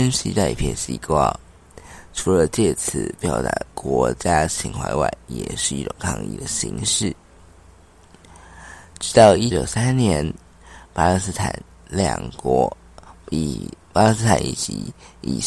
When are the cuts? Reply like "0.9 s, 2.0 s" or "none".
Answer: 9.5 s